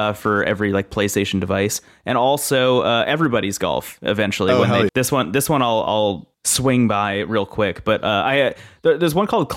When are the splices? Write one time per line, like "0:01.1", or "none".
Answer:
0:04.9